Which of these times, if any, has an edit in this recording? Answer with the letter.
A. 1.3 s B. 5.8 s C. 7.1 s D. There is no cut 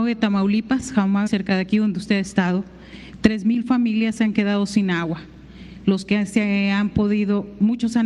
A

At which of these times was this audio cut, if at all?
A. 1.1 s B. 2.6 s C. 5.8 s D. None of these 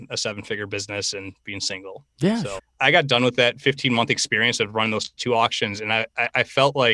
B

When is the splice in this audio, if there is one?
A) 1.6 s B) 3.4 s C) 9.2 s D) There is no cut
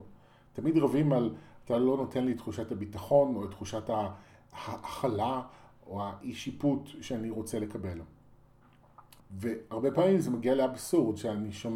C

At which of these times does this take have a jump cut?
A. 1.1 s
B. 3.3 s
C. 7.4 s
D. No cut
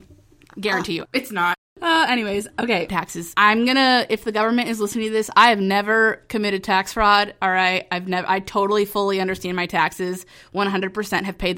A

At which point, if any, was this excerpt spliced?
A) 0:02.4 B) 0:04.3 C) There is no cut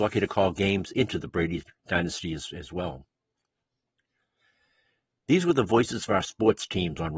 C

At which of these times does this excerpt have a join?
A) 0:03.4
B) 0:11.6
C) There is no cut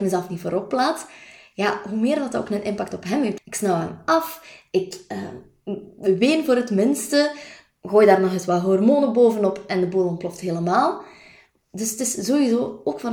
A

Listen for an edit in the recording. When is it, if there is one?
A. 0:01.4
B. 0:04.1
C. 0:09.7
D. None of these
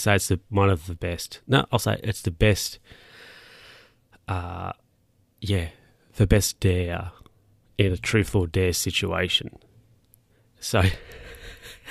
D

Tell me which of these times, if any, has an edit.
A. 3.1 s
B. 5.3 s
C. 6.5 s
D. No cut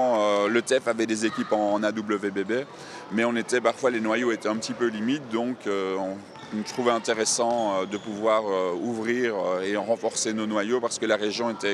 D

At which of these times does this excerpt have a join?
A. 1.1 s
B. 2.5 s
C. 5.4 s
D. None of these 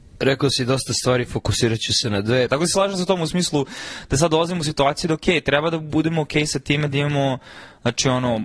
B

